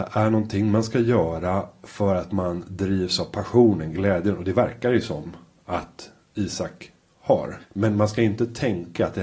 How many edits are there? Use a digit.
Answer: 1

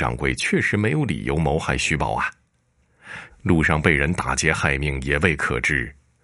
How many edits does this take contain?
1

